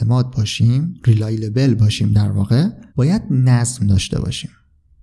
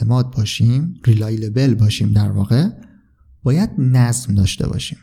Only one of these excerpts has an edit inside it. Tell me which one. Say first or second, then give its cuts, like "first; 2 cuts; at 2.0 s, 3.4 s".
first; 1 cut; at 2.9 s